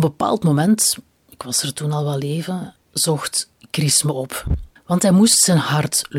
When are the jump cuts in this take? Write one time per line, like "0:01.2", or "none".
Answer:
0:02.8
0:04.8